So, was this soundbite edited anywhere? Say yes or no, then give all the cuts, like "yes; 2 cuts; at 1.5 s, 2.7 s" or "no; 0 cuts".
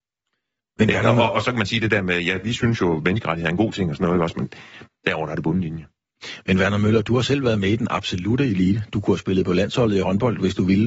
yes; 1 cut; at 4.9 s